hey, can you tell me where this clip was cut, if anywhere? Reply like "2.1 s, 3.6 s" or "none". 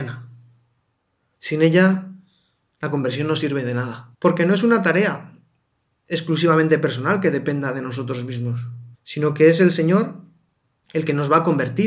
1.3 s, 4.1 s, 8.9 s